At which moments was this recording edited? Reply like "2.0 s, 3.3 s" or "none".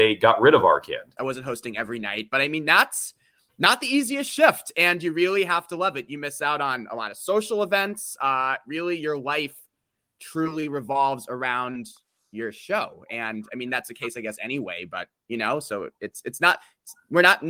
1.2 s